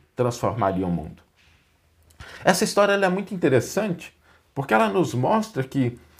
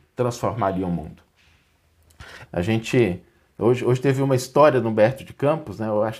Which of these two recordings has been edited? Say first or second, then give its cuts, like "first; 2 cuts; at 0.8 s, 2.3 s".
second; 1 cut; at 2.4 s